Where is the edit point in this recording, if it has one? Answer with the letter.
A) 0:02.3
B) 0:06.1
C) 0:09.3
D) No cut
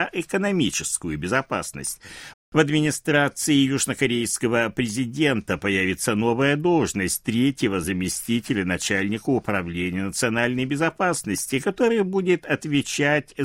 A